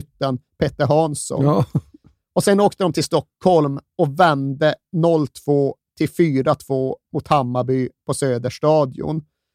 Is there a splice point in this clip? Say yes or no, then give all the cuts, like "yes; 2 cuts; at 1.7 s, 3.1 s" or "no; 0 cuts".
no; 0 cuts